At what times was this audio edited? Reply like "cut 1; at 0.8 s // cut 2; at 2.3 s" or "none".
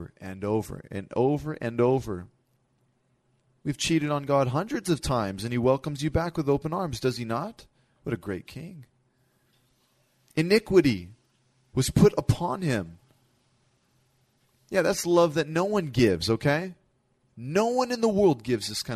none